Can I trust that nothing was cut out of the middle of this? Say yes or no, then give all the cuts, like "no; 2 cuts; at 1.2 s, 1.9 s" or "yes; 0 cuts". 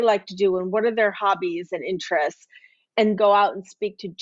no; 1 cut; at 3.2 s